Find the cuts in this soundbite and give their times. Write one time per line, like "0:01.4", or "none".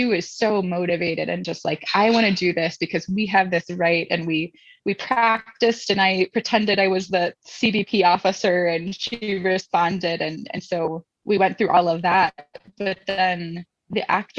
none